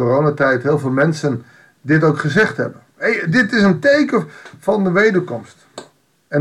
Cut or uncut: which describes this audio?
cut